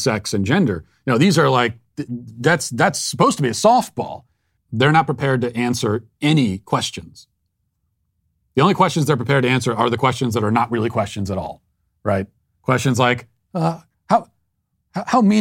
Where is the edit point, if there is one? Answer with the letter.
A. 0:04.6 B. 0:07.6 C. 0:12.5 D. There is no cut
A